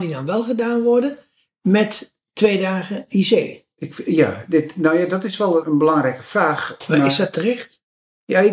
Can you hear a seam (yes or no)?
yes